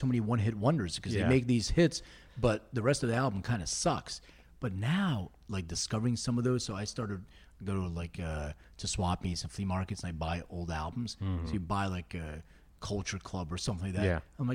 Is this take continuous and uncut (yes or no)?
yes